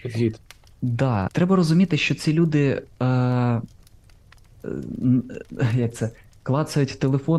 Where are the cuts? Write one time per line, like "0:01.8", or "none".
0:01.3